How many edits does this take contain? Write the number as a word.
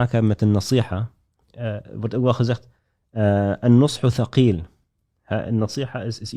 zero